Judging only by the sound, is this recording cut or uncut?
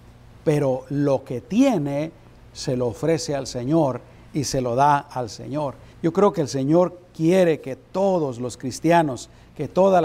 cut